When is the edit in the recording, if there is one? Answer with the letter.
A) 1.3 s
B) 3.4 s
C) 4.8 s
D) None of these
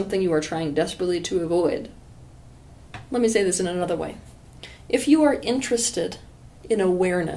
D